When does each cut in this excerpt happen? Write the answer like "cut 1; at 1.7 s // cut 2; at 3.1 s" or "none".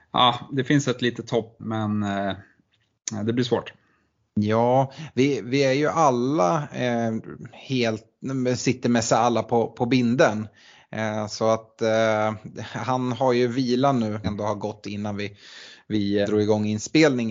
cut 1; at 1.6 s // cut 2; at 14.2 s // cut 3; at 16.2 s